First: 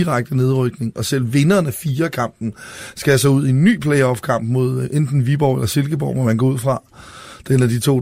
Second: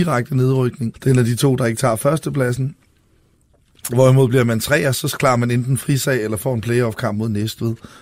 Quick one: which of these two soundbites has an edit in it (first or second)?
second